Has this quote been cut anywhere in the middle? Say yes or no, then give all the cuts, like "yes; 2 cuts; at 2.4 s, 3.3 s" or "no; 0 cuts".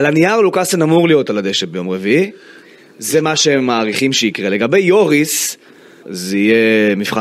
yes; 1 cut; at 6.0 s